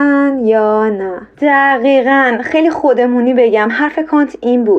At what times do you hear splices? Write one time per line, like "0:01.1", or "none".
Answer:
0:01.3